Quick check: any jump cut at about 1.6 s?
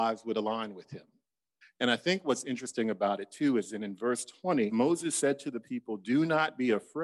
yes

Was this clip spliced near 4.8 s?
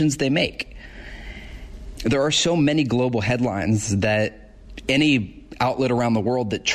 no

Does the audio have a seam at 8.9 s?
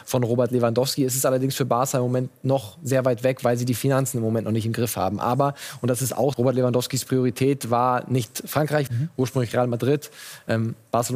yes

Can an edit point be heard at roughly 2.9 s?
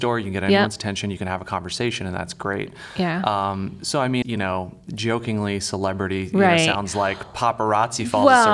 no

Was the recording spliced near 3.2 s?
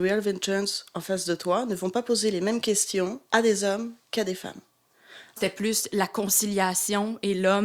yes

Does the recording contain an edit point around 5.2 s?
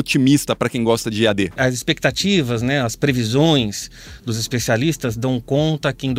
no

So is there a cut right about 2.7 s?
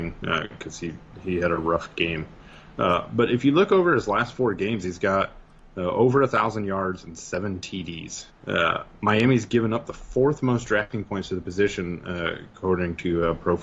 no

